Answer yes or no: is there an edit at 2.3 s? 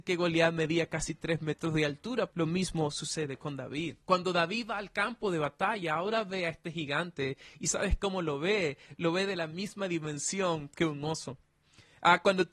yes